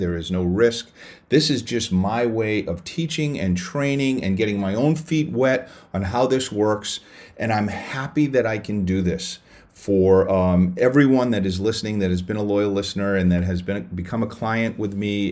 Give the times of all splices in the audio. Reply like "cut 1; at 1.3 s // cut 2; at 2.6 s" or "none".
none